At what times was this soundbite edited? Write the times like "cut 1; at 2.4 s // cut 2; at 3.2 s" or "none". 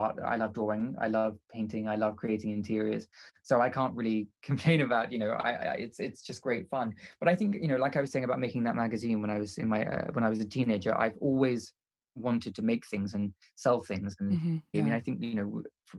cut 1; at 14.7 s